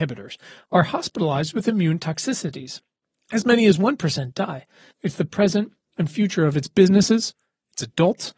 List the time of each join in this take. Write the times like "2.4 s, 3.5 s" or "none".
4.9 s